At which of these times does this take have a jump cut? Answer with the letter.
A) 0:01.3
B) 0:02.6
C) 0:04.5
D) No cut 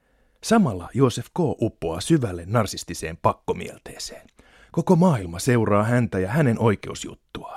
D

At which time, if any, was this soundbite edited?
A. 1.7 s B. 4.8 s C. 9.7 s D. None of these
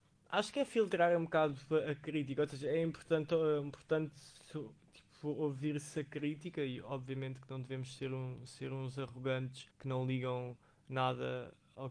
C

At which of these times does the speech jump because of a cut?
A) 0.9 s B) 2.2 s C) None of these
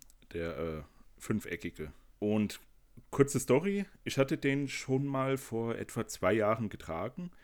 B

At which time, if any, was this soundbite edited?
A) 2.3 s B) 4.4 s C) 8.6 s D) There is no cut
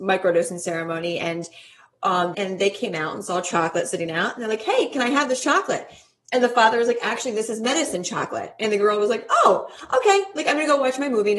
A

